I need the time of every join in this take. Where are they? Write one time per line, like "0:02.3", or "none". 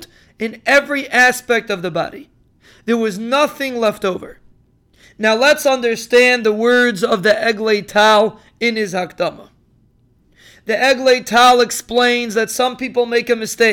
0:05.0